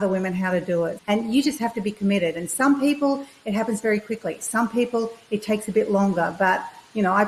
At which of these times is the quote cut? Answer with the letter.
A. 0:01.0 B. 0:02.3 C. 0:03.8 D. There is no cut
A